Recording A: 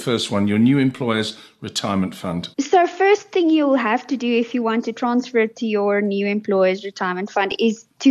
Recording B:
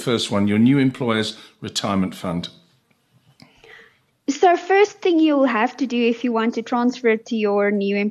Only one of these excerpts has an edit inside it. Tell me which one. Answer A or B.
A